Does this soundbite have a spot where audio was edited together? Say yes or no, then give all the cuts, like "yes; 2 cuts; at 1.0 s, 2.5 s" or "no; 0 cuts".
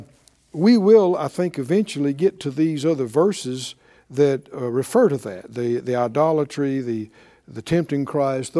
no; 0 cuts